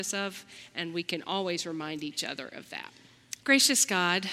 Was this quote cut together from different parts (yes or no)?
yes